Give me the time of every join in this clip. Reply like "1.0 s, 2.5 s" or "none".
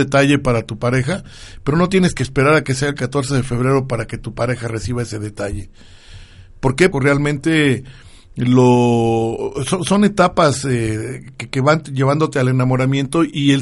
6.9 s

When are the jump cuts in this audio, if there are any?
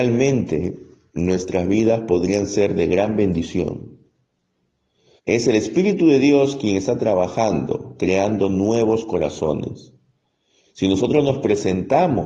5.2 s, 8.0 s, 10.6 s

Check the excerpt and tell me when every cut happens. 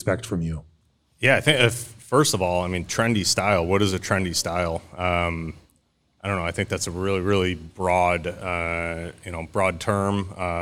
none

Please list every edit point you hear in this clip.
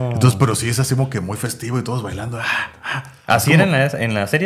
none

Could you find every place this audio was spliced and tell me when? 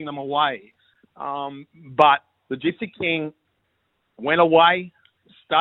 none

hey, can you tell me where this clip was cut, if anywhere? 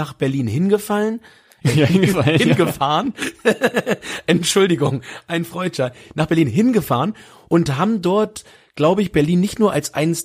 none

